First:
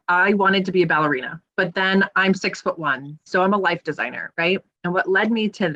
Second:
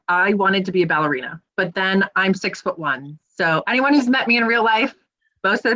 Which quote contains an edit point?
first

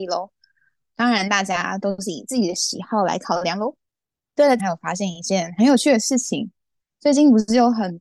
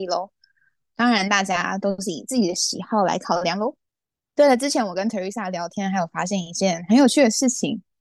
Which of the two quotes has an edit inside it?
first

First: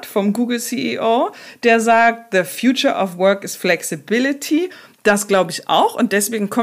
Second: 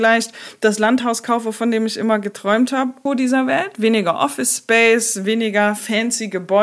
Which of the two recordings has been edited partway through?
second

